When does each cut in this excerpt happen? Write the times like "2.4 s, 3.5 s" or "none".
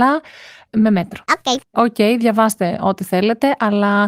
1.6 s